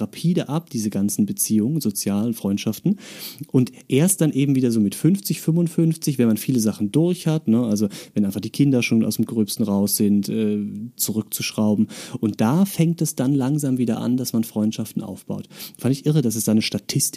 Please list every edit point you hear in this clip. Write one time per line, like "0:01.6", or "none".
0:11.0